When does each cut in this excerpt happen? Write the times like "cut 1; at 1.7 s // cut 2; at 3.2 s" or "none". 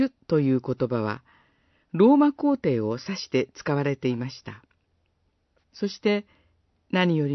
cut 1; at 5.6 s